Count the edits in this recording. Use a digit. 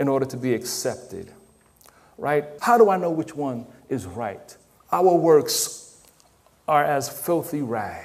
2